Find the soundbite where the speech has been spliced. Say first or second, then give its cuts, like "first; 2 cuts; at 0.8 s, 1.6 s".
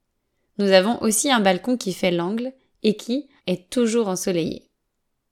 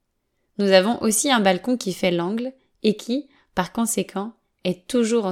first; 1 cut; at 3.4 s